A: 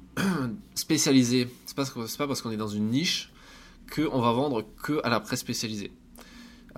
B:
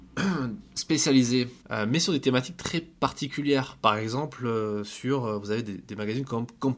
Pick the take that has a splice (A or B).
B